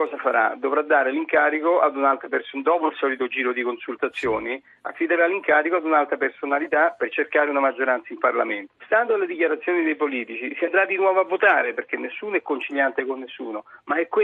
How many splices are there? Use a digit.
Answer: 1